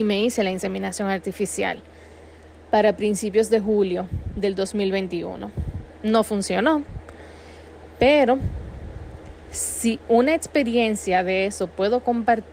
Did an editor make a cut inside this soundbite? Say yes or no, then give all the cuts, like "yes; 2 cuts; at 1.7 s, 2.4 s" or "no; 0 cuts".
no; 0 cuts